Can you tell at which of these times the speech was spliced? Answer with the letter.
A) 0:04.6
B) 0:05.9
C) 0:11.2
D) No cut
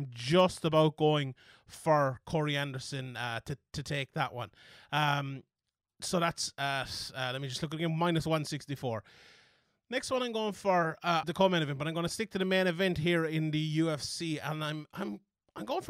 C